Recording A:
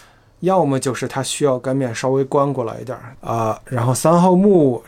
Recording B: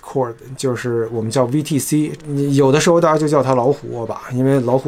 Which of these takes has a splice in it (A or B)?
A